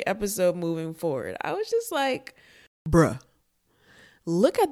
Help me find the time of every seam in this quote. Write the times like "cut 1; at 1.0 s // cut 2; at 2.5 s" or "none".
none